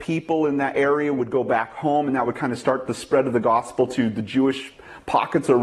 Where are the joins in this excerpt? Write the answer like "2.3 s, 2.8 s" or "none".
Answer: none